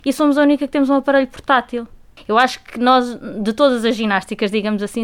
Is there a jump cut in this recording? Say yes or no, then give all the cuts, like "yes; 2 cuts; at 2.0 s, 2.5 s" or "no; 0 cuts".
yes; 1 cut; at 2.2 s